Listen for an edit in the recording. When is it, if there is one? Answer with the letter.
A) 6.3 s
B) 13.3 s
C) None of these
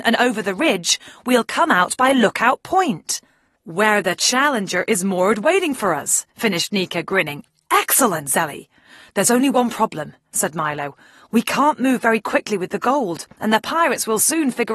C